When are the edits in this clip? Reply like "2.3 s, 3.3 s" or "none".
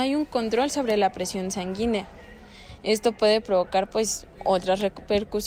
none